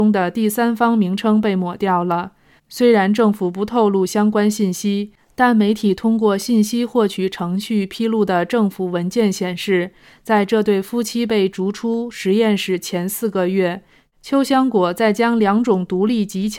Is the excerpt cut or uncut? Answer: cut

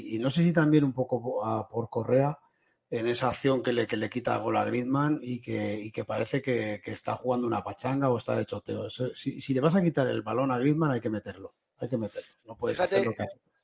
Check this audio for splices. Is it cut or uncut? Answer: uncut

